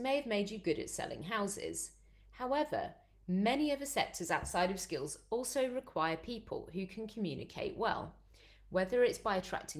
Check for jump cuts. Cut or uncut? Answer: uncut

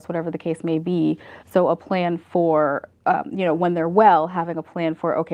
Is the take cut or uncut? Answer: cut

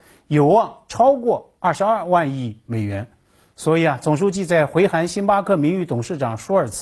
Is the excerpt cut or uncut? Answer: uncut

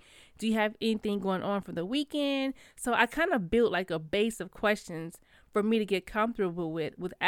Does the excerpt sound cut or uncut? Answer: uncut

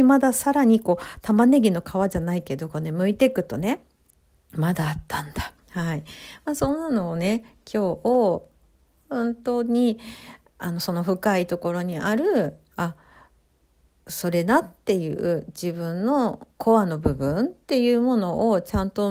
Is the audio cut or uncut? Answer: cut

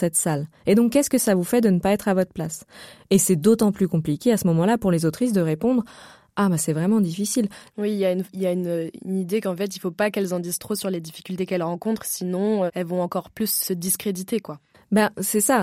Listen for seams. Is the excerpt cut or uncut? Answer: cut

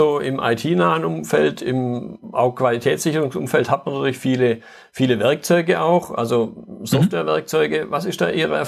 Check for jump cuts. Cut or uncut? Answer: uncut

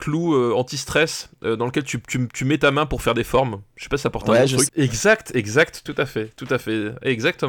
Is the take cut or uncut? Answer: cut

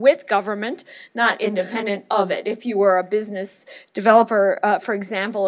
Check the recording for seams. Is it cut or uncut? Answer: uncut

